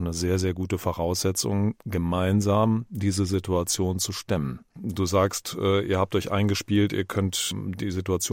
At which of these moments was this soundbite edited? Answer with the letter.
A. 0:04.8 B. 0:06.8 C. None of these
A